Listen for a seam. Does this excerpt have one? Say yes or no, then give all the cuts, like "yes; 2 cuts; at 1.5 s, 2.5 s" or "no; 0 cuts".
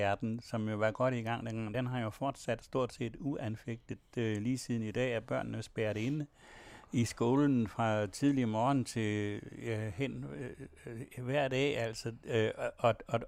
no; 0 cuts